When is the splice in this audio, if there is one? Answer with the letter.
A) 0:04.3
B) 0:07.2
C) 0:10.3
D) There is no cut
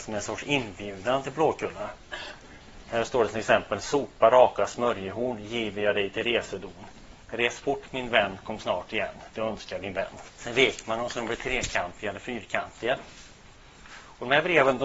D